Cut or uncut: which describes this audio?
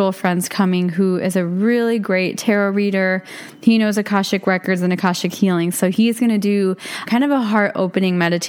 cut